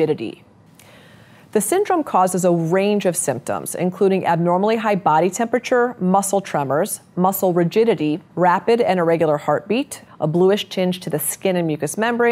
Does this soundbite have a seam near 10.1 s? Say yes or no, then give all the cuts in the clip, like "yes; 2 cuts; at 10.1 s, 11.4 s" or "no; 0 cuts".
yes; 2 cuts; at 8.3 s, 10.1 s